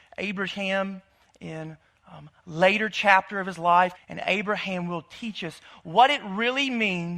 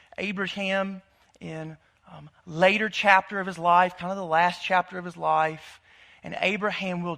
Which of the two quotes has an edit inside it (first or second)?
first